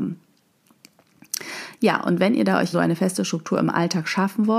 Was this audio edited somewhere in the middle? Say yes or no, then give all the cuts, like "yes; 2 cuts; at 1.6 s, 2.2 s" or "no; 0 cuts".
yes; 1 cut; at 2.7 s